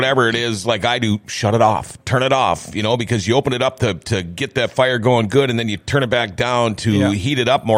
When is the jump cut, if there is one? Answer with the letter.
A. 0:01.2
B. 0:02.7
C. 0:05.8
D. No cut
D